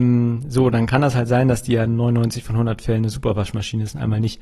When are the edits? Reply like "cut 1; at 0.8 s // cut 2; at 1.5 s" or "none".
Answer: none